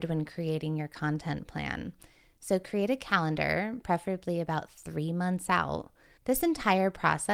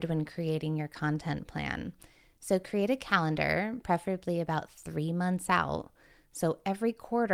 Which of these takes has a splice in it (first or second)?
first